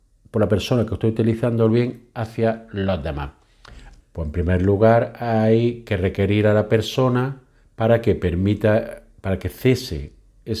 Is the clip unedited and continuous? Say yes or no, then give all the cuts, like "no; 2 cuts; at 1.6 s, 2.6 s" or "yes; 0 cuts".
no; 1 cut; at 4.0 s